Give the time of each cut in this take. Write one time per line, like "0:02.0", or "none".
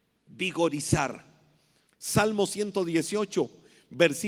0:01.9